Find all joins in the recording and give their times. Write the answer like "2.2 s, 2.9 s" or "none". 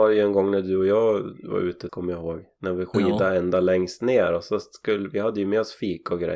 1.9 s

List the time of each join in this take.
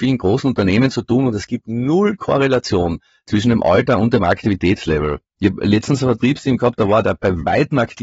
none

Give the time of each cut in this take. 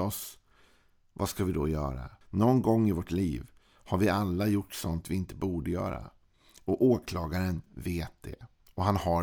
2.2 s

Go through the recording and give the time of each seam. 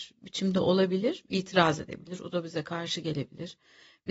none

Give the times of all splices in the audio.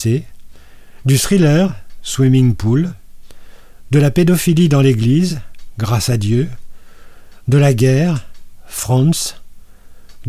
none

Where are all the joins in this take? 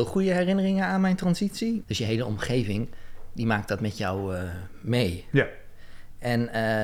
1.8 s

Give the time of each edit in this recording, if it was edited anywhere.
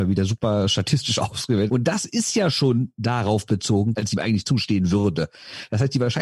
1.7 s, 3.9 s

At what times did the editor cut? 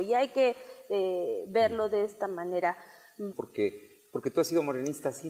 3.3 s

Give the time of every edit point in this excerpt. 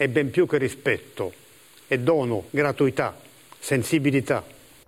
2.5 s

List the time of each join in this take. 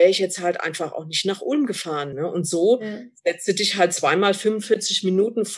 2.1 s

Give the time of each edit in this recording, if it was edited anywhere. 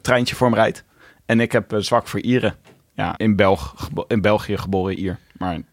3.2 s

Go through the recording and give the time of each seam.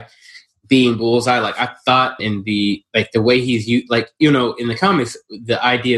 2.2 s

